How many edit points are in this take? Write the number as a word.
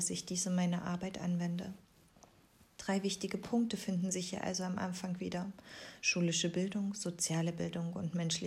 zero